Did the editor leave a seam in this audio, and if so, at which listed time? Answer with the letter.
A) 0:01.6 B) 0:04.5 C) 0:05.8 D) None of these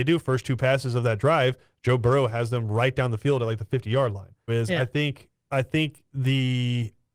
B